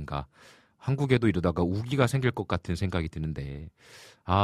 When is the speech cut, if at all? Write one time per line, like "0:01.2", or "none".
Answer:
none